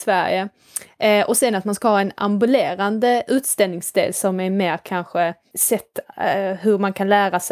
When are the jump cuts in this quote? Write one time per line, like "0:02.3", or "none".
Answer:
0:05.5